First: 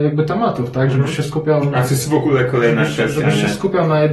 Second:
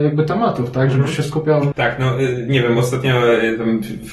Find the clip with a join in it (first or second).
second